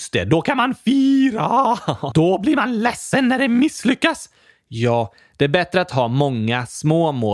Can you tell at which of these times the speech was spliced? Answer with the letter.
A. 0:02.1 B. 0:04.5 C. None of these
A